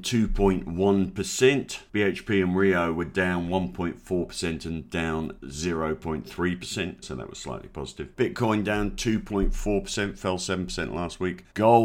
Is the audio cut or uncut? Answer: cut